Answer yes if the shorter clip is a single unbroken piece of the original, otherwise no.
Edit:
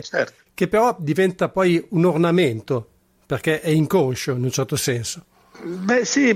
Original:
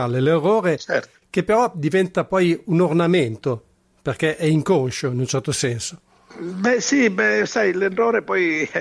yes